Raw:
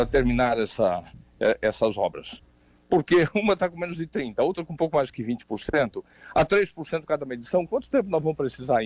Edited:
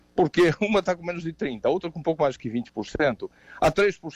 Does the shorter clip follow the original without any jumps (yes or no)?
yes